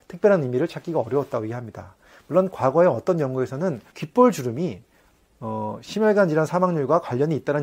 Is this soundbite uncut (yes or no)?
no